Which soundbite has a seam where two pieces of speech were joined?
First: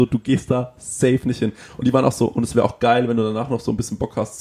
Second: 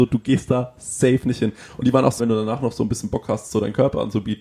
second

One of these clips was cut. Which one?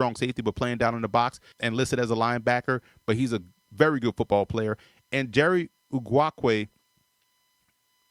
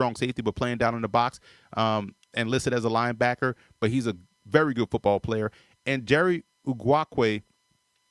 first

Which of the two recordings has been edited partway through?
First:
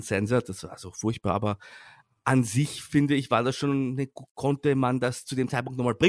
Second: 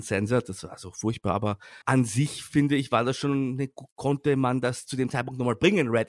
second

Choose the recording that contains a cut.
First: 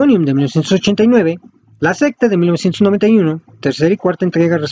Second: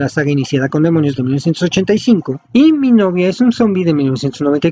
second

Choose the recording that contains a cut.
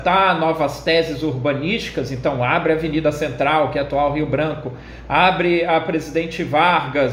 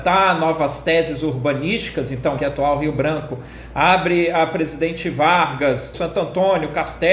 second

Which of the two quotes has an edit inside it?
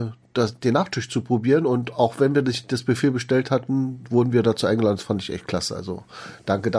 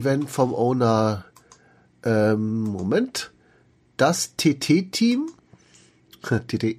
second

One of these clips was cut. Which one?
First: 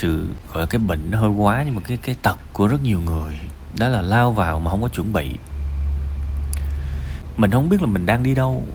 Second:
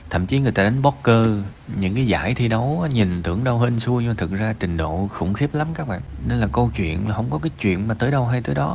first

